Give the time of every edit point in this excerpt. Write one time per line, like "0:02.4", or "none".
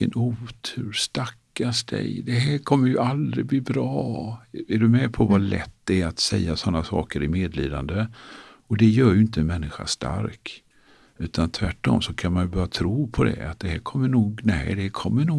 none